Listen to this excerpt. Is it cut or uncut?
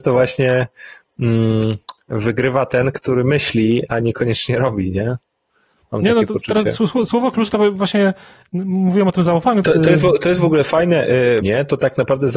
cut